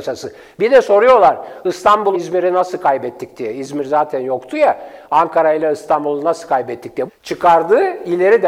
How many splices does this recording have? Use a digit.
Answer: 2